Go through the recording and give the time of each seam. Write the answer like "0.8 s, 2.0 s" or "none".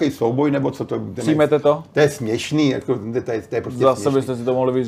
none